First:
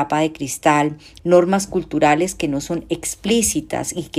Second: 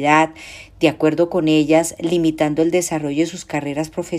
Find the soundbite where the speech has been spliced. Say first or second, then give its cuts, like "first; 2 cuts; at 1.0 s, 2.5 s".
first; 1 cut; at 1.2 s